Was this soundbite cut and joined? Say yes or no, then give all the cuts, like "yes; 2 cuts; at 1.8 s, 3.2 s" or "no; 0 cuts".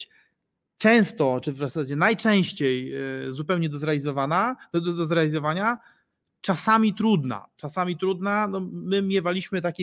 no; 0 cuts